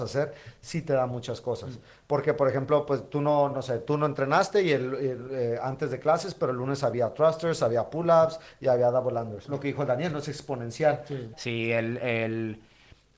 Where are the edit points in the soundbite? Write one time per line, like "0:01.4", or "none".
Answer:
0:09.4
0:11.3